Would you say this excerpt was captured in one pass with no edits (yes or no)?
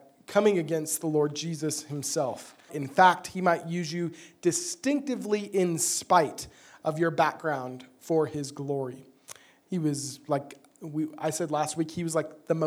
no